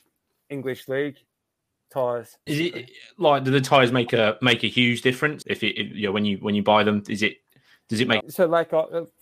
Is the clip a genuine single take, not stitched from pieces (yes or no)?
no